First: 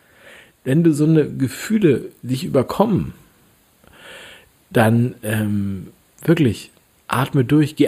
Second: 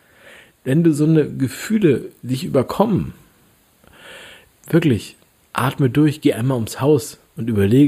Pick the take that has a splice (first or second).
second